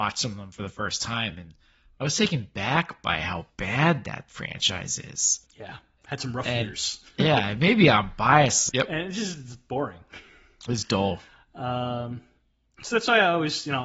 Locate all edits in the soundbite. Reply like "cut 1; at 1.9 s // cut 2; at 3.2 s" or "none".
cut 1; at 5.4 s // cut 2; at 8.7 s